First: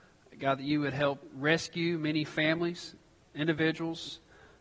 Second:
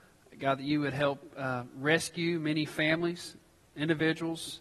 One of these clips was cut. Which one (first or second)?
first